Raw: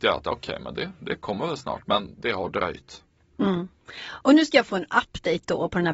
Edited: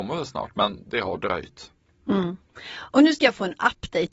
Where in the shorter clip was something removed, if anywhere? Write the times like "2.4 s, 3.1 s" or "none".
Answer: none